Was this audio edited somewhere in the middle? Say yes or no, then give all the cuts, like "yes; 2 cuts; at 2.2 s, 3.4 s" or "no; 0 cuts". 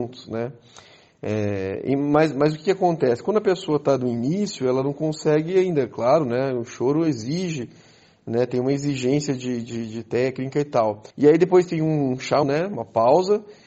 yes; 2 cuts; at 11.1 s, 12.4 s